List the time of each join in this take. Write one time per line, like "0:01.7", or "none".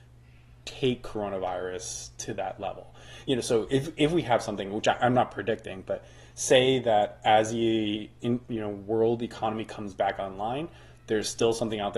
none